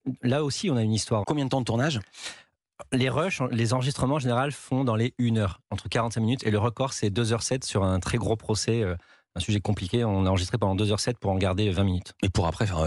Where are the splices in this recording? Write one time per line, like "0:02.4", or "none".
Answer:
0:01.2